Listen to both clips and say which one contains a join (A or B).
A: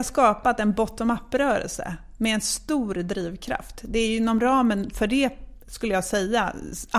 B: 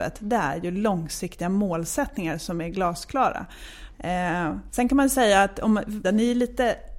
B